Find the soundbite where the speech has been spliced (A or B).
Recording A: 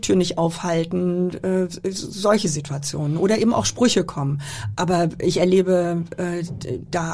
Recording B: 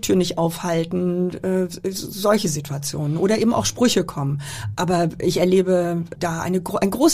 B